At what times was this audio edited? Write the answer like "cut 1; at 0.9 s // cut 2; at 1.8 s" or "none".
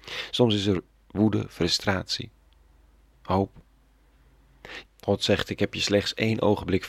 cut 1; at 3.1 s // cut 2; at 4.8 s